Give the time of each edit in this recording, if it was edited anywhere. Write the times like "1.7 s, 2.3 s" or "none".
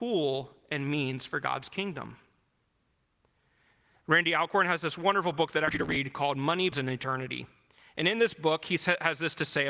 6.7 s